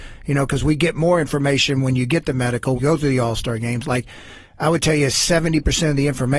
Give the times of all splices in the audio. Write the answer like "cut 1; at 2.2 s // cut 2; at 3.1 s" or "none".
cut 1; at 2.8 s

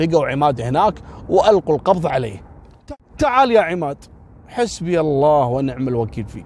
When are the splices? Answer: none

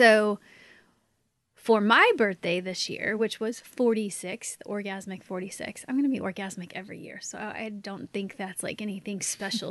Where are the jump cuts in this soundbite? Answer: none

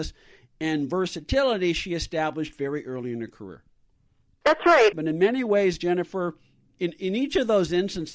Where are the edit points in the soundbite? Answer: cut 1; at 4.9 s // cut 2; at 6.7 s

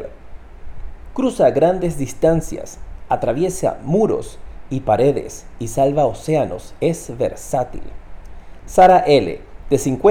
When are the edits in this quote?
cut 1; at 1.1 s

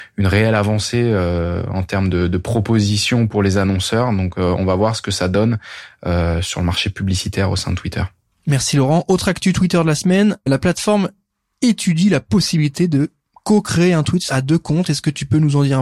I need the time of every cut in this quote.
none

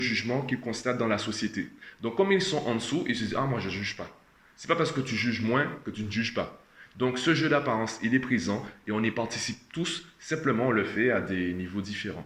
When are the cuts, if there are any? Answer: none

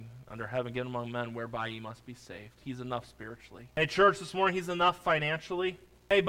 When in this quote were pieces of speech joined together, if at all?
cut 1; at 2.6 s

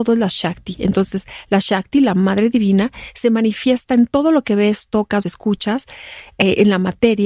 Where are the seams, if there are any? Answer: cut 1; at 5.2 s

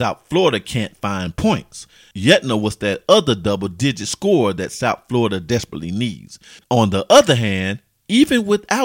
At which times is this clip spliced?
cut 1; at 6.6 s

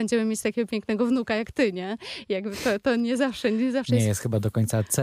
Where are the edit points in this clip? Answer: cut 1; at 2.8 s

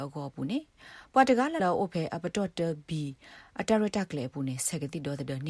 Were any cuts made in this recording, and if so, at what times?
cut 1; at 1.6 s

